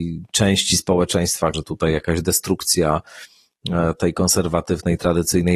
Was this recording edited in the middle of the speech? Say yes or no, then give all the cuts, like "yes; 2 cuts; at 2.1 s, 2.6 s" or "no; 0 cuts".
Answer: yes; 1 cut; at 1.5 s